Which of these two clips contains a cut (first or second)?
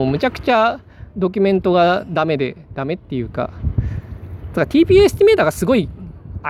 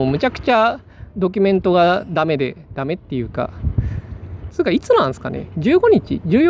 second